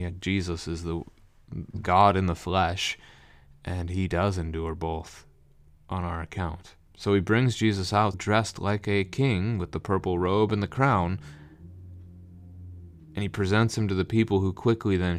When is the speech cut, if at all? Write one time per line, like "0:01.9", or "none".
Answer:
0:06.8
0:08.1